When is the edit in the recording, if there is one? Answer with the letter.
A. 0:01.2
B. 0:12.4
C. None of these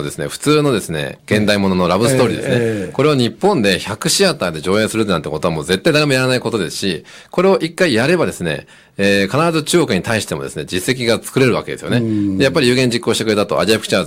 A